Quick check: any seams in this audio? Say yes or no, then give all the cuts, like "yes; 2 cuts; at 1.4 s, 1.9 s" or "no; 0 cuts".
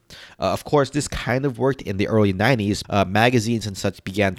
yes; 1 cut; at 2.8 s